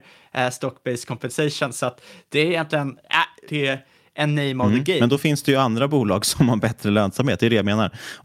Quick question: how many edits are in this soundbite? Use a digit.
1